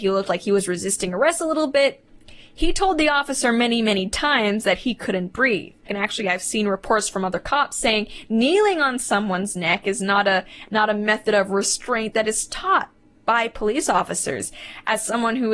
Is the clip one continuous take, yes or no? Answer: no